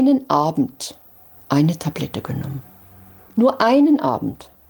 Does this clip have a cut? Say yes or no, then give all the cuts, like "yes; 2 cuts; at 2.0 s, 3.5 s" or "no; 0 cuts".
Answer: no; 0 cuts